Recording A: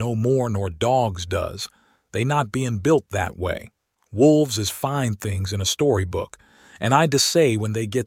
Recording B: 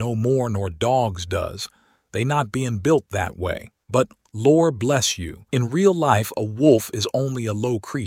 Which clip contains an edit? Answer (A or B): B